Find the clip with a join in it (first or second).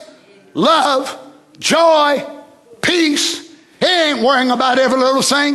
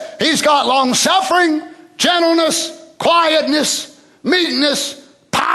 first